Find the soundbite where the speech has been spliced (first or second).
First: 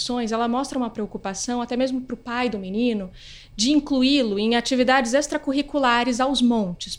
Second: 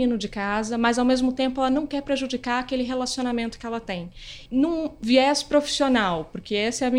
second